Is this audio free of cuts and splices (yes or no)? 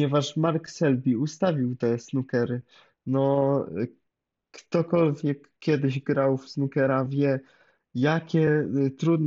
yes